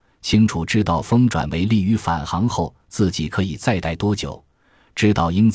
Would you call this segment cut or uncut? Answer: uncut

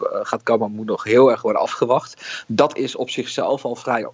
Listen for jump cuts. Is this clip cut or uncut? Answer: uncut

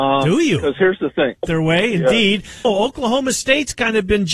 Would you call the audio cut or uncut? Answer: cut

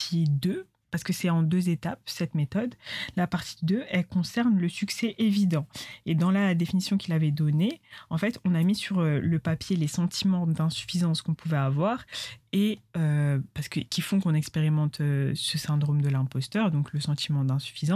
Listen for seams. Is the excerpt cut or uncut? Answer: uncut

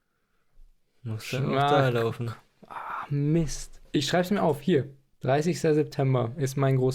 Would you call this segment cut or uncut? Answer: cut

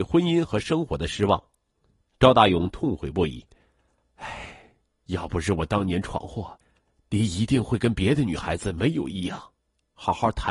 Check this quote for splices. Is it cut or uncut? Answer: uncut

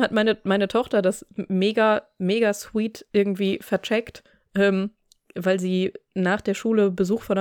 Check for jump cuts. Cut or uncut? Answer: uncut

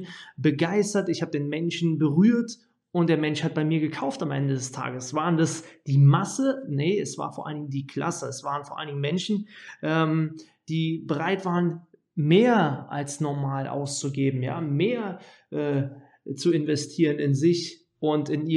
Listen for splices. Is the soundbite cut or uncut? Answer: uncut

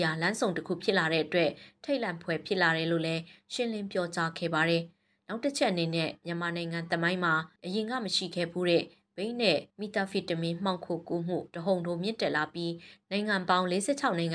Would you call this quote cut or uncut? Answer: cut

